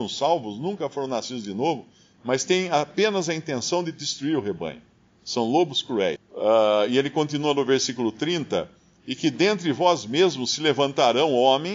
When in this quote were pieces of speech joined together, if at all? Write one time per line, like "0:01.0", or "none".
0:06.2

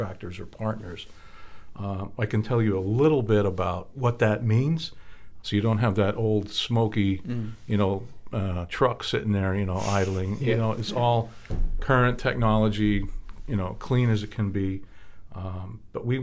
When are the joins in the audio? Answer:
0:05.4

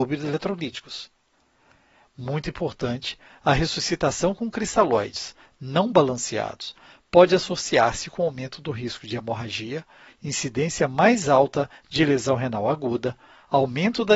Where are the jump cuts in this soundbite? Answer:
0:10.1

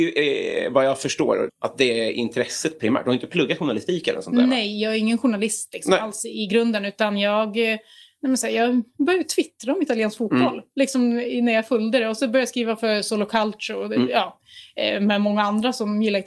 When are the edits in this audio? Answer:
0:01.5

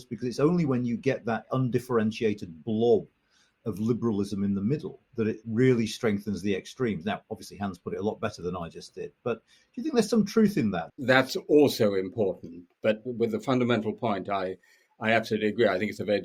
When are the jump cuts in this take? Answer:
0:10.9

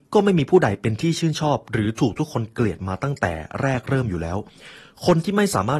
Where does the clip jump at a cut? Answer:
none

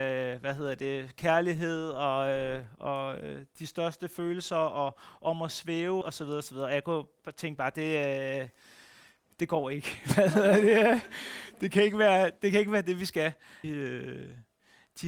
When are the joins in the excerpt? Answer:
0:06.0
0:13.6

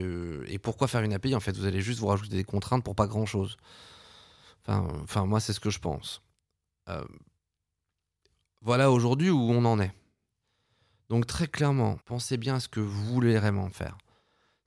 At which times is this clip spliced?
0:12.0

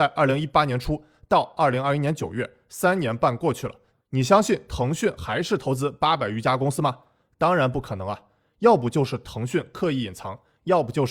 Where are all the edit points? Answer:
0:07.2

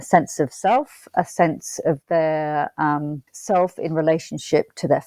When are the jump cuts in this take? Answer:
0:03.3

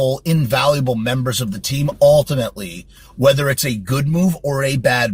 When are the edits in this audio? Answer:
none

